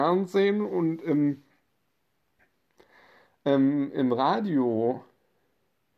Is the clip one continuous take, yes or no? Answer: yes